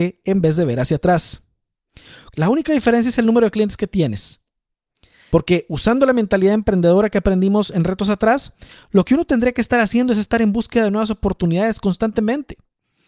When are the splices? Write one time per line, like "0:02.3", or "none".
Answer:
0:02.3
0:05.3